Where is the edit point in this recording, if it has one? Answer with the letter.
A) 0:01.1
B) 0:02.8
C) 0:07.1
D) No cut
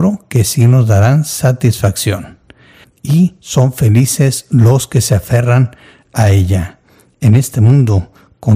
B